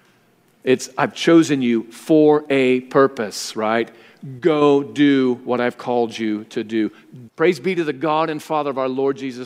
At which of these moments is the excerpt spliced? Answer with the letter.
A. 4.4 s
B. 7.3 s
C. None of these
B